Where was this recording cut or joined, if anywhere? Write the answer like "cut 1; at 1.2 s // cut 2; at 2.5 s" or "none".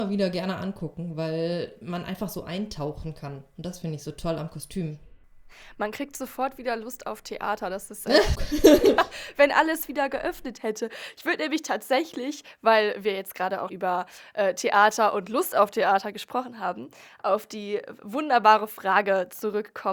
cut 1; at 8.4 s // cut 2; at 13.7 s